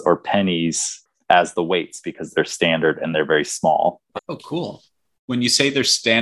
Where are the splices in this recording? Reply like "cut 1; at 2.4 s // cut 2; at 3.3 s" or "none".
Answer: cut 1; at 4.2 s